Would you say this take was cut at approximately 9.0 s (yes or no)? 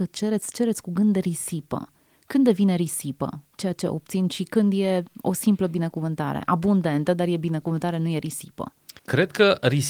yes